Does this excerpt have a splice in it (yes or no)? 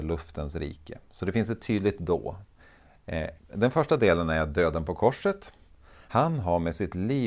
yes